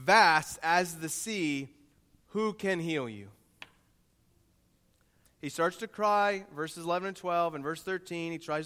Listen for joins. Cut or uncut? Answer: cut